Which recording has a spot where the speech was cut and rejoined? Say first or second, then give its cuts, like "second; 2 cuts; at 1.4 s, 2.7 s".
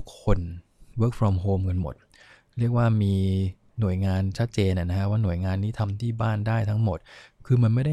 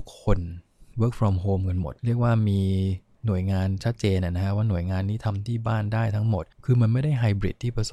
second; 2 cuts; at 2.0 s, 6.5 s